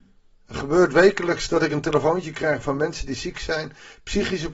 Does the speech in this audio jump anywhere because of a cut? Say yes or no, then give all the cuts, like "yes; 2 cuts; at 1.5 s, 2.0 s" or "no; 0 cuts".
no; 0 cuts